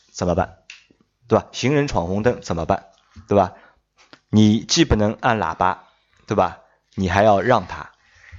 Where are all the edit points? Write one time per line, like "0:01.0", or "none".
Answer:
none